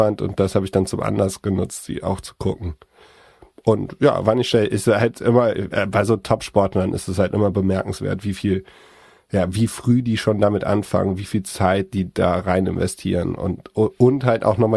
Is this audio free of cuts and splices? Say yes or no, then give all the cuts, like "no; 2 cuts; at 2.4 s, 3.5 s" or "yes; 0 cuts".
yes; 0 cuts